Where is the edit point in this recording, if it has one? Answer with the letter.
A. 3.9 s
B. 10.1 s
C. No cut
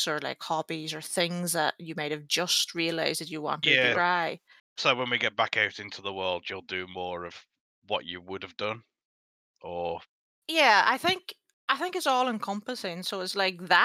A